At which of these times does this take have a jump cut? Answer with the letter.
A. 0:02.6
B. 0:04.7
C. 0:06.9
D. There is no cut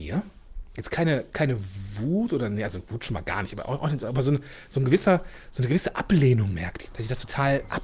C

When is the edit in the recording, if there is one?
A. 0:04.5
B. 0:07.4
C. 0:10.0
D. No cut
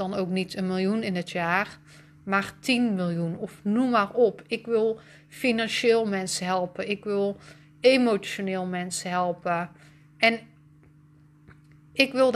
D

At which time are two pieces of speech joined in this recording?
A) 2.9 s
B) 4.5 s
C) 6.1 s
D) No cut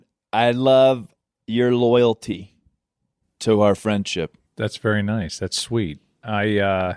B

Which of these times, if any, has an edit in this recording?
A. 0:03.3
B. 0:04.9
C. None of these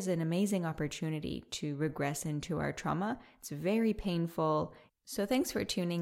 B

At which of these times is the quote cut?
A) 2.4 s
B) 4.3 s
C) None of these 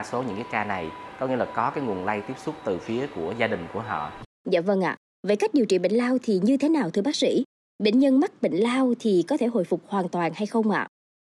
B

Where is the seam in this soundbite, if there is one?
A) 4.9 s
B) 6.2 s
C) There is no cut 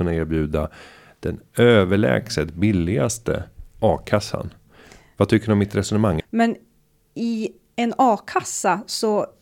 B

